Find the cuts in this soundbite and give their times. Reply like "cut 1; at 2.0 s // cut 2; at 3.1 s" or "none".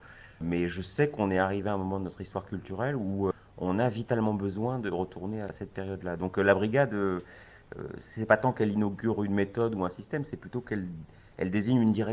none

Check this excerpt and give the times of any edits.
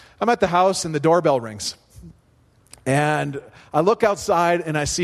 none

